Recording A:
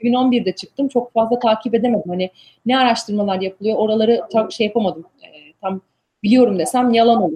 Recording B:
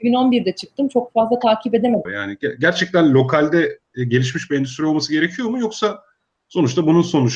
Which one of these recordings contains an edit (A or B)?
B